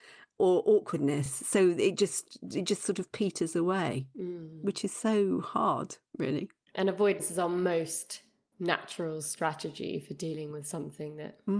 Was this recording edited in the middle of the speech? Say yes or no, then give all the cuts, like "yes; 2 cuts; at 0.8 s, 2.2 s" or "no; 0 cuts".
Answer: no; 0 cuts